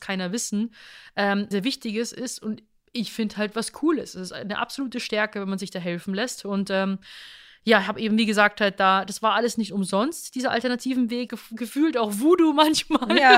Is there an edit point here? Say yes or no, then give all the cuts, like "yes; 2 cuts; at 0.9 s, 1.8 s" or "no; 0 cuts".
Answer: yes; 2 cuts; at 1.5 s, 11.3 s